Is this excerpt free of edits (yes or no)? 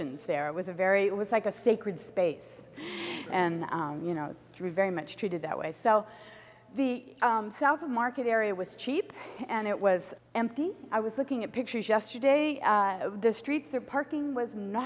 yes